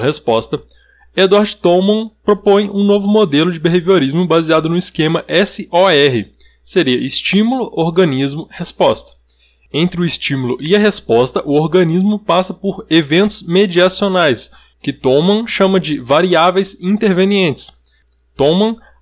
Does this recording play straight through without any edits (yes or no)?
yes